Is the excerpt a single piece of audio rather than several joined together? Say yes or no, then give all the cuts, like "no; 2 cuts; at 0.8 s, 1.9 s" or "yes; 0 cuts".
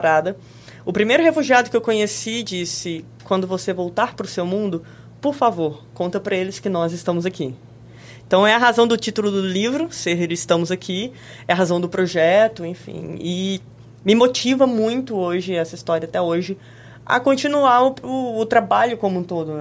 yes; 0 cuts